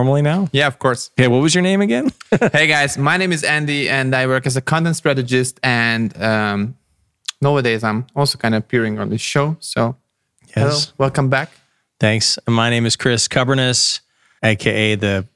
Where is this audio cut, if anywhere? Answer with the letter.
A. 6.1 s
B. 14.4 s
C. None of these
B